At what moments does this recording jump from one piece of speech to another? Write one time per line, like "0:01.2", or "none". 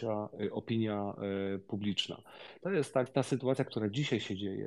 0:03.1